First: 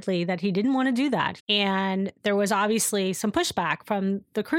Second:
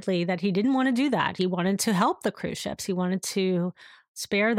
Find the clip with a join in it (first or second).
first